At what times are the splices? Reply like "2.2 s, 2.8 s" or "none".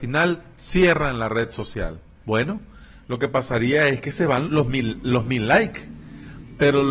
2.2 s, 4.5 s